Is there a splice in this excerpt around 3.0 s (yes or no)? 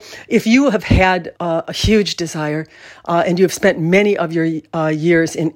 no